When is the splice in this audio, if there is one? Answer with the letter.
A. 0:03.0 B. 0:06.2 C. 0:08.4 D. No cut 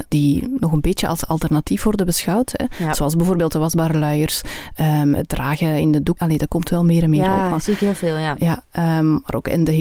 B